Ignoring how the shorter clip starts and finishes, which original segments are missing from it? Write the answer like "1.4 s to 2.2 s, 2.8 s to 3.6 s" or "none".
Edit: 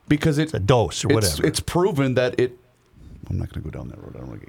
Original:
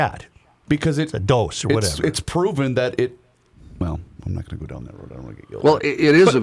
3.8 s to 4.1 s